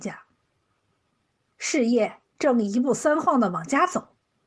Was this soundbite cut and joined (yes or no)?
yes